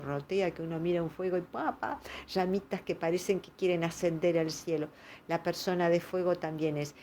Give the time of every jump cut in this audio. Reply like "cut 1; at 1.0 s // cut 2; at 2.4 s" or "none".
cut 1; at 1.8 s